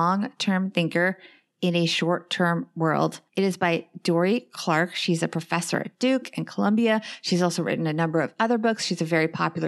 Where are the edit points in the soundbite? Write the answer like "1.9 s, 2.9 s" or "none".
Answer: 3.3 s

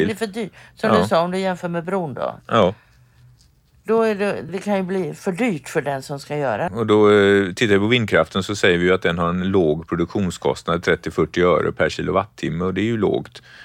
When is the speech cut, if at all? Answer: 4.5 s, 6.7 s

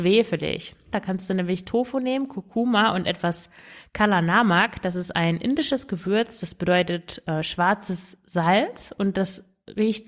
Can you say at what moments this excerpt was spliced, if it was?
0.9 s

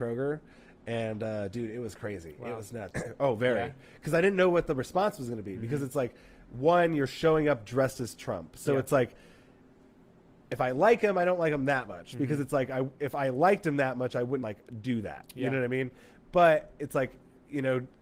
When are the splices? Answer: 2.9 s, 14.4 s

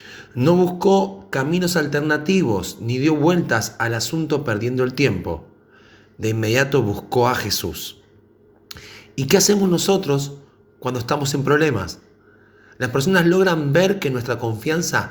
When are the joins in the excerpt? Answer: none

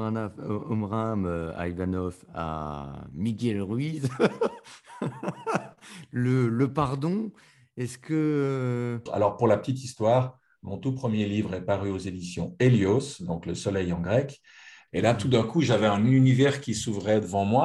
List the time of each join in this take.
9.1 s, 14.9 s

